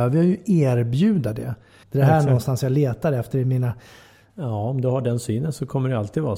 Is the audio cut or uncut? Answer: cut